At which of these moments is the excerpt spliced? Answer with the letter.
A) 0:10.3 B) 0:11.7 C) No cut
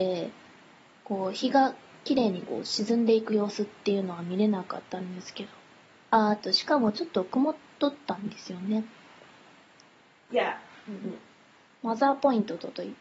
A